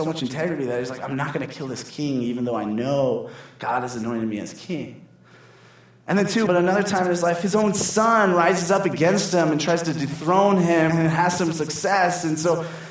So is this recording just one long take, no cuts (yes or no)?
no